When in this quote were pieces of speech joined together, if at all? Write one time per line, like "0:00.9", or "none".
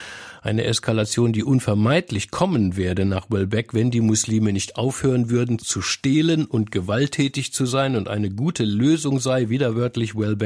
0:05.6